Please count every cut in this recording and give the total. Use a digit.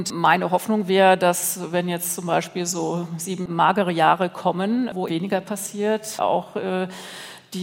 1